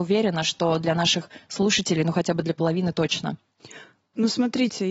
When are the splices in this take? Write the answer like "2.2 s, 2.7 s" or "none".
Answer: none